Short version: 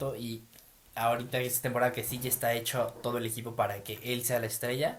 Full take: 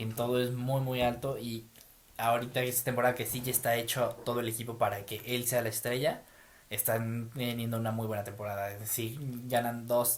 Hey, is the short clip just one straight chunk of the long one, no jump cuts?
yes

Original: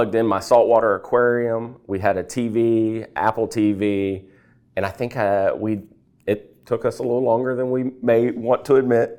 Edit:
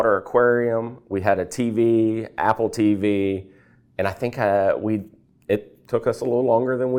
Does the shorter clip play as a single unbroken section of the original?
yes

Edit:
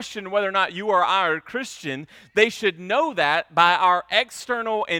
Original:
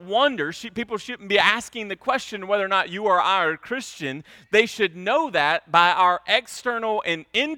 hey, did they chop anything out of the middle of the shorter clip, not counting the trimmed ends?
no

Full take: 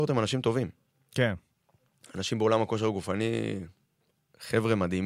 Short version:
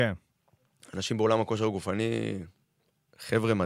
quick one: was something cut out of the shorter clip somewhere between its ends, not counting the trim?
no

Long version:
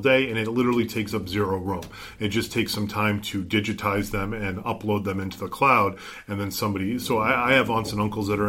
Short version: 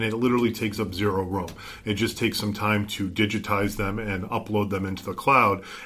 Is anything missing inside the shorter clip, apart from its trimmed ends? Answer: no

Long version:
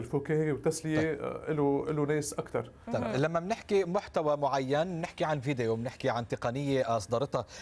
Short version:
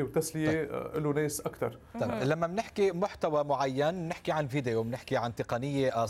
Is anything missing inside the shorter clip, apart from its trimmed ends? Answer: yes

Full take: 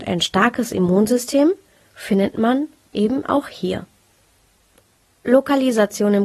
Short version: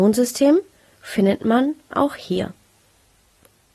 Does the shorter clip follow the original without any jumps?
no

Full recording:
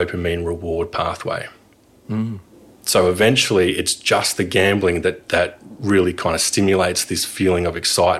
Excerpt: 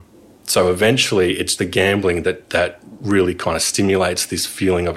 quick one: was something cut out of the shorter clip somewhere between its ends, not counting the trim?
yes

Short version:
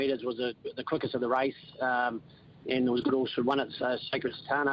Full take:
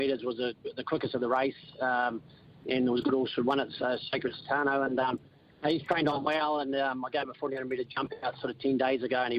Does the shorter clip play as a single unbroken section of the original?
yes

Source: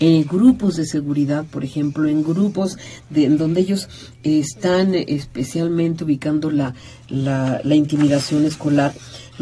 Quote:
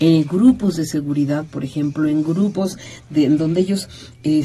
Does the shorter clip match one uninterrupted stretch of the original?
yes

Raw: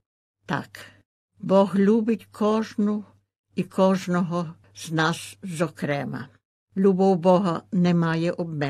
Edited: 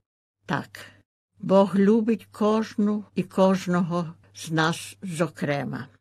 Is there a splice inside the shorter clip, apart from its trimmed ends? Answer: yes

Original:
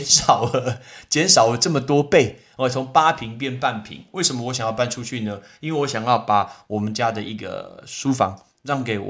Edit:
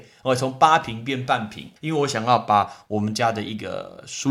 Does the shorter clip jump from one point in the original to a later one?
yes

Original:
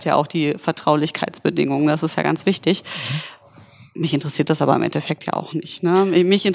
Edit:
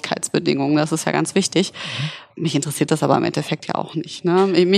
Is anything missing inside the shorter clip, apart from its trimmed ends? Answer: yes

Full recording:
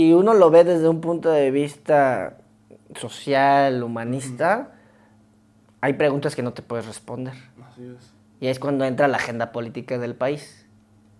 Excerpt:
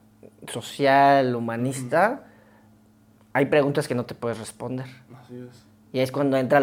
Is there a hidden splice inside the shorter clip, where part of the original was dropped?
no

